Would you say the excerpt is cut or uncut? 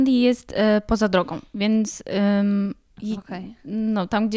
uncut